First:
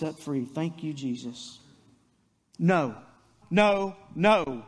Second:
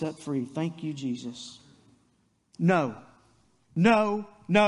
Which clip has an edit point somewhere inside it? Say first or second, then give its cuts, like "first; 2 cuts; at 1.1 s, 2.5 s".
first; 1 cut; at 3.4 s